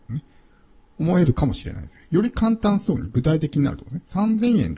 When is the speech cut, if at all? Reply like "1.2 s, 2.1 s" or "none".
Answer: none

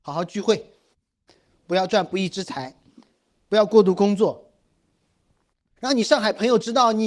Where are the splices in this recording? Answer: none

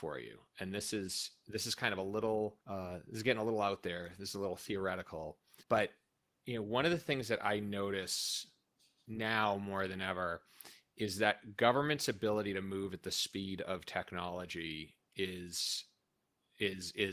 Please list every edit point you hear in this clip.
2.6 s, 5.6 s

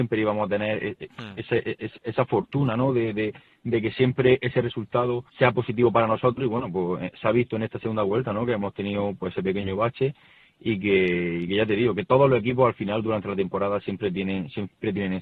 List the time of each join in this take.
5.3 s

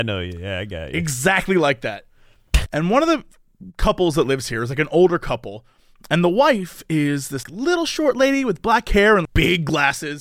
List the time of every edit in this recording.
2.7 s, 7.4 s, 9.3 s

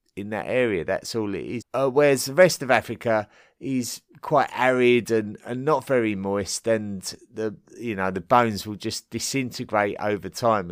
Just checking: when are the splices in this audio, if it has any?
1.6 s

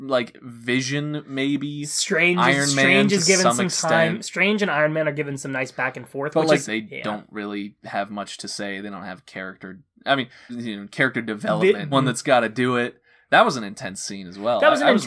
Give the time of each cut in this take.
6.7 s, 10.5 s, 11.9 s

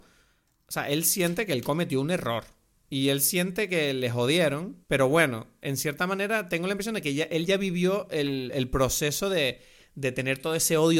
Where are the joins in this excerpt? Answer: 4.8 s

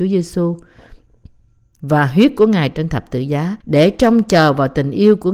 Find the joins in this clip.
3.6 s

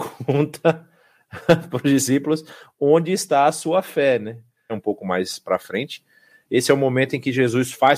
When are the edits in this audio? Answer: 4.7 s

